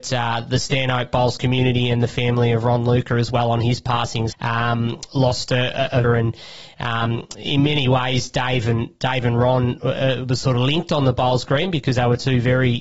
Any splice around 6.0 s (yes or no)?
yes